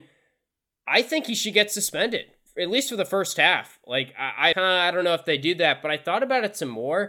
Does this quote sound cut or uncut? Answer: cut